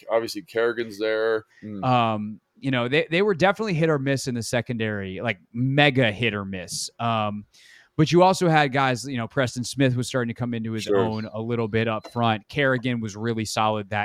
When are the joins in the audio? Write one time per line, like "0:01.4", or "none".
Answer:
0:01.5